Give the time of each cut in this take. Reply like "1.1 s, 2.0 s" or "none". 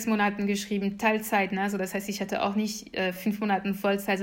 none